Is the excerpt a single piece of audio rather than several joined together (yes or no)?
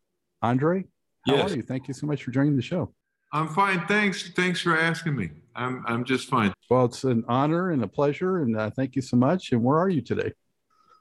no